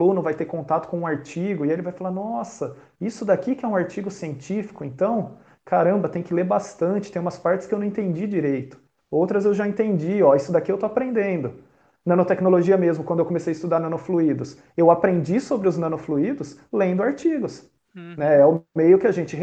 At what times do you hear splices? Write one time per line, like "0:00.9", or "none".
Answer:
none